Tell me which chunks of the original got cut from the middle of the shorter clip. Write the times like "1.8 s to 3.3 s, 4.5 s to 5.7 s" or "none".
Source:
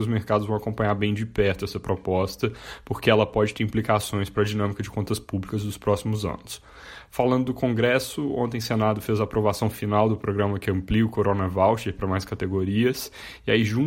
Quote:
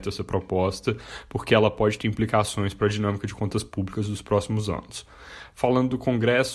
none

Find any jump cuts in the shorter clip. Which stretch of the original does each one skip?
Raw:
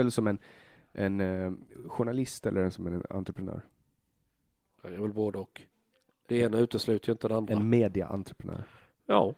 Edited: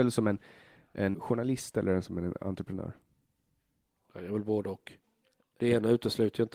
1.1 s to 1.8 s

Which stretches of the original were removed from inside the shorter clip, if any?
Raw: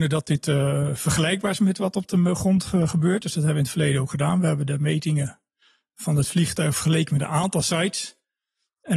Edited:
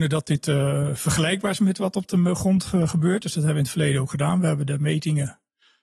none

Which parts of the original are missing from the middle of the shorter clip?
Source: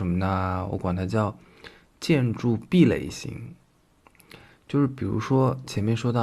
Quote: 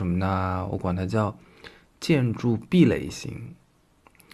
none

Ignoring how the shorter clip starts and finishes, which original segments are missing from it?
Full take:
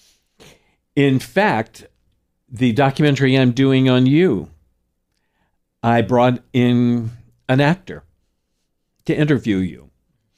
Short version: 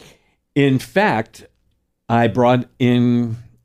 2.3 s to 5.7 s

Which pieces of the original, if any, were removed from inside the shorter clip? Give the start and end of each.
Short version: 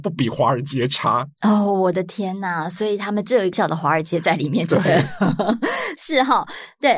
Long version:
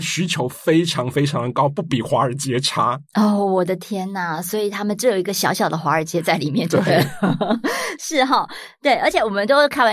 5.3 s to 5.5 s

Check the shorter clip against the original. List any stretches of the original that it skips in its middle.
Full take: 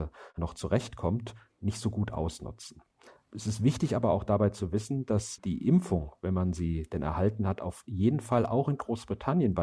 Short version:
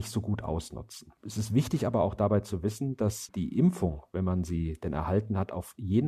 2.9 s to 3.3 s

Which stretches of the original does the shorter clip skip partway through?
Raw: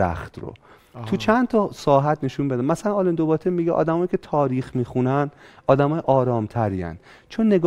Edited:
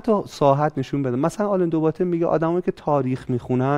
none

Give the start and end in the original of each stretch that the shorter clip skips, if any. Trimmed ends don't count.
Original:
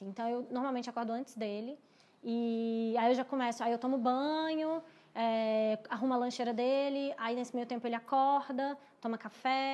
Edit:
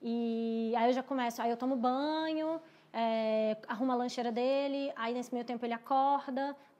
none

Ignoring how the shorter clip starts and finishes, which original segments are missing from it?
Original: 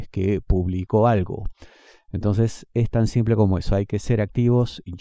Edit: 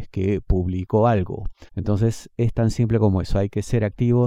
1.7 s to 2.0 s

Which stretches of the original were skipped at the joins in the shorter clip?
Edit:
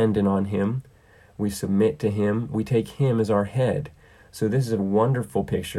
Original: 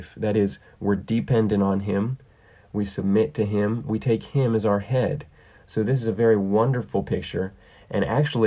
6.1 s to 6.4 s

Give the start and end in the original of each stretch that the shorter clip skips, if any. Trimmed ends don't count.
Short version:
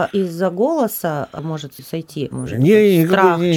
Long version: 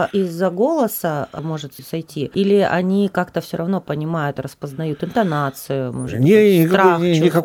2.3 s to 5.9 s

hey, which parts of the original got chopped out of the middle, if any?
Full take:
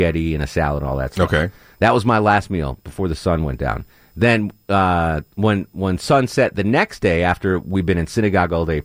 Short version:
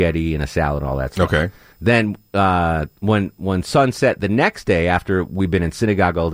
1.7 s to 4.1 s

